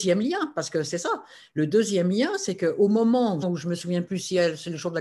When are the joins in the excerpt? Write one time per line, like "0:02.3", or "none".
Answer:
0:03.4